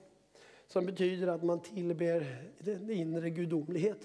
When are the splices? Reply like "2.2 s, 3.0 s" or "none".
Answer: 2.5 s